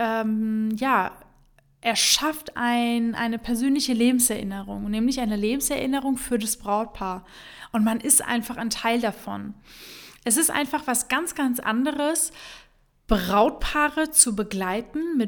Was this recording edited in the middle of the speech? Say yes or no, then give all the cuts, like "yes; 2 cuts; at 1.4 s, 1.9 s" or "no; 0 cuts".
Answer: no; 0 cuts